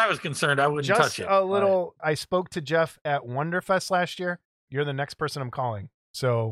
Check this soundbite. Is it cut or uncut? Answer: cut